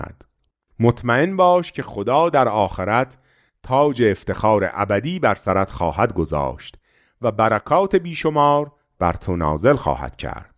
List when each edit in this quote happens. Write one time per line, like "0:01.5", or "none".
none

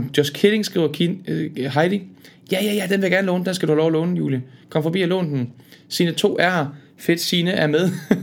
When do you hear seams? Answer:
none

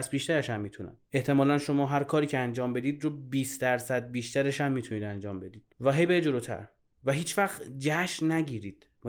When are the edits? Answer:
0:01.0
0:05.7

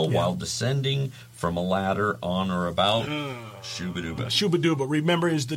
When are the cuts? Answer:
none

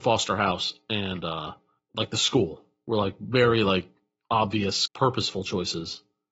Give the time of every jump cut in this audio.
0:04.9

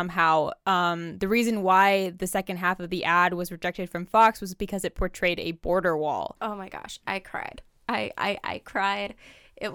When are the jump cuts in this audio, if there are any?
0:08.4

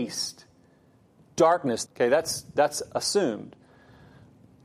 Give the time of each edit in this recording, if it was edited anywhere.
0:01.9

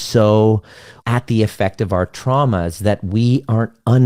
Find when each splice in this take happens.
0:01.0

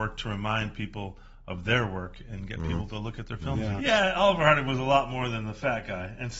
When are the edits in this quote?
0:03.8

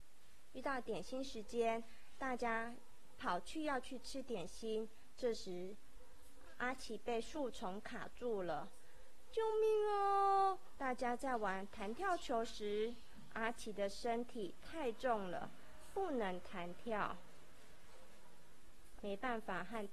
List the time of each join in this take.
0:10.8
0:19.0

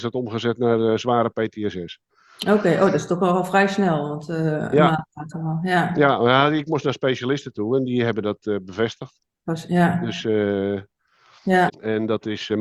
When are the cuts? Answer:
0:11.7

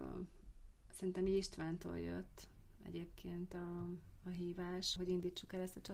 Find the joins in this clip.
0:05.0

